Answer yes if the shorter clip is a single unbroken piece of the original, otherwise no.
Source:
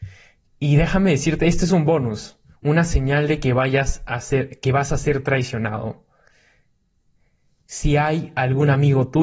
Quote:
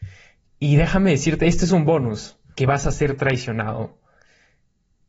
no